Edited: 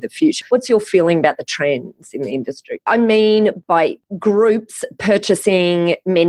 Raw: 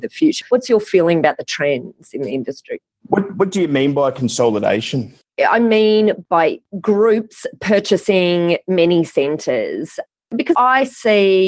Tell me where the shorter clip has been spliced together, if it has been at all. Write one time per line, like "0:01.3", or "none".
0:02.9